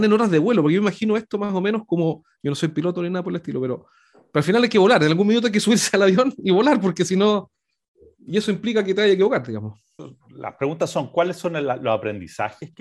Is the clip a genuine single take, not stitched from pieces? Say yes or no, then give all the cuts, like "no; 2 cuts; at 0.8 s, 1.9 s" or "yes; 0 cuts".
yes; 0 cuts